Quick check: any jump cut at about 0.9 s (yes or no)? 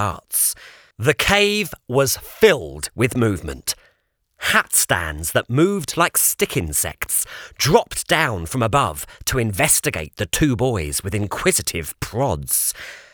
yes